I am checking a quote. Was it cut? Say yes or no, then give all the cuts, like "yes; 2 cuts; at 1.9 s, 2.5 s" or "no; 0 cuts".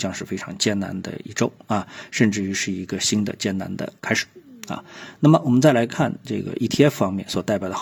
no; 0 cuts